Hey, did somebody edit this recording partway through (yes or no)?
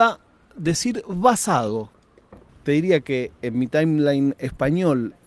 yes